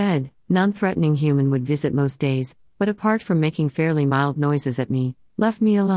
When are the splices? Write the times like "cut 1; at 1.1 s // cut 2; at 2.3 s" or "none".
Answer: none